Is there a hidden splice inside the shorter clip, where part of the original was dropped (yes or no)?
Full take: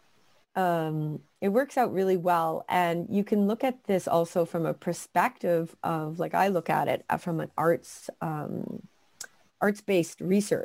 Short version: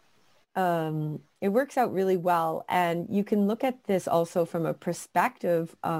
no